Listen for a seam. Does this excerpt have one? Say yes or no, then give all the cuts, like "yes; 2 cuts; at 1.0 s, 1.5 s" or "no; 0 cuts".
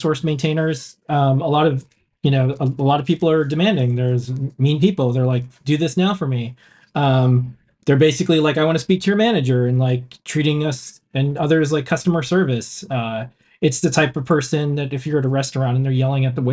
no; 0 cuts